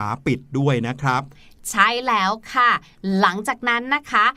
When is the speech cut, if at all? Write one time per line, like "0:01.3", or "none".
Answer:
none